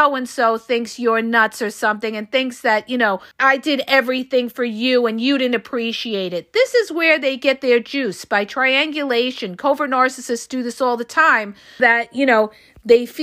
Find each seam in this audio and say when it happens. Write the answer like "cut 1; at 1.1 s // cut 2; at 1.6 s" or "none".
cut 1; at 3.3 s // cut 2; at 11.8 s